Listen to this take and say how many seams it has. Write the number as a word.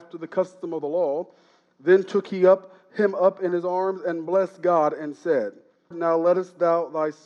one